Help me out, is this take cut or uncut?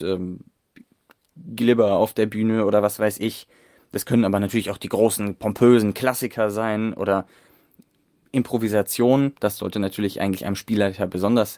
uncut